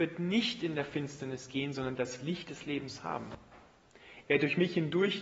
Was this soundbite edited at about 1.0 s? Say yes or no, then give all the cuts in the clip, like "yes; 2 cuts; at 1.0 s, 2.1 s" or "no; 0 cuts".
no; 1 cut; at 4.2 s